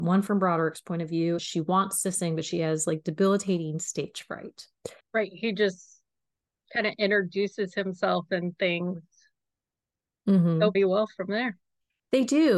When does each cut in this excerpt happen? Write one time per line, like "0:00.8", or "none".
0:01.4
0:05.0
0:10.7